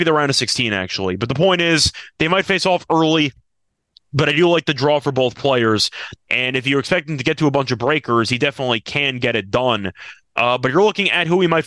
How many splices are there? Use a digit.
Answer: 1